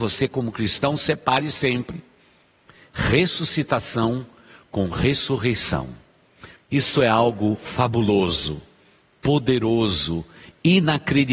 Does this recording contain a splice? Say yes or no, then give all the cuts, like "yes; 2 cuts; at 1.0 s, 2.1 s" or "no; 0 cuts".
yes; 1 cut; at 6.6 s